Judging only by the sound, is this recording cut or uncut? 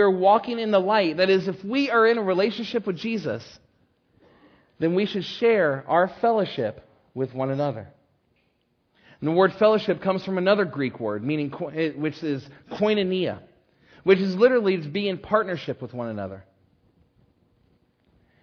uncut